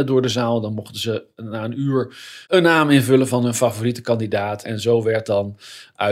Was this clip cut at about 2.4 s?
yes; 2 cuts; at 2.4 s, 4.6 s

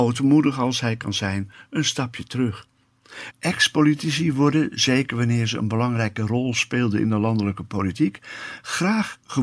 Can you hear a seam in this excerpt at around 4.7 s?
no; 1 cut; at 3.3 s

